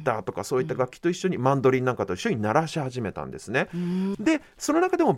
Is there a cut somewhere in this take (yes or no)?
yes